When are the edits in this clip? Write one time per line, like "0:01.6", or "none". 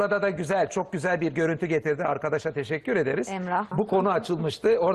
0:03.7